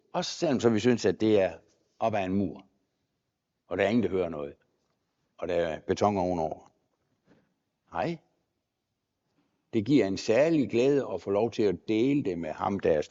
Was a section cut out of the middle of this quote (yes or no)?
no